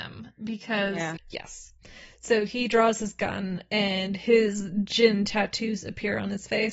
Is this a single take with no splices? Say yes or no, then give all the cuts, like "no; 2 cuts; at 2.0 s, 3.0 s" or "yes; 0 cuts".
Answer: no; 1 cut; at 1.2 s